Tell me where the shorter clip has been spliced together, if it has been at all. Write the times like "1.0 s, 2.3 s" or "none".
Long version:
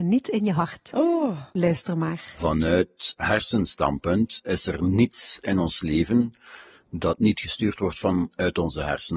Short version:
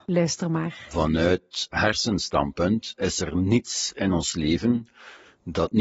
none